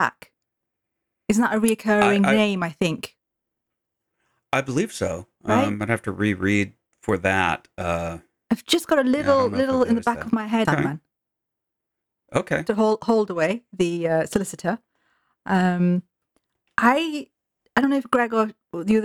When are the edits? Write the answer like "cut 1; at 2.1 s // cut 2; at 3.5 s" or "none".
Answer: cut 1; at 10.6 s // cut 2; at 12.7 s